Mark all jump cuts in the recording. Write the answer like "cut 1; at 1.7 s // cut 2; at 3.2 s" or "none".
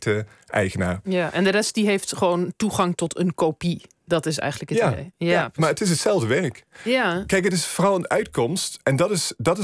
cut 1; at 1.0 s